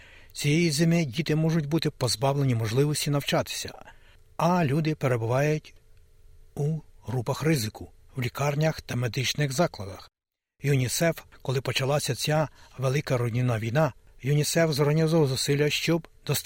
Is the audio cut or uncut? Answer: cut